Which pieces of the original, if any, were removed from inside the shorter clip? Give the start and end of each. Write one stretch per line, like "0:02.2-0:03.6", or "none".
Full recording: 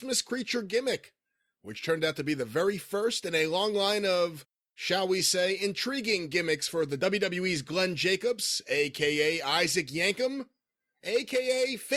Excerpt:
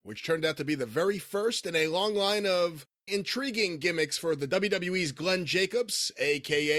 0:04.7-0:05.6